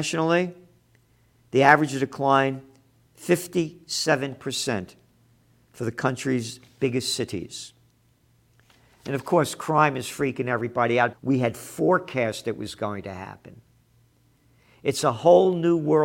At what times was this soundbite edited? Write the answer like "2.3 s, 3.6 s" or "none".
11.1 s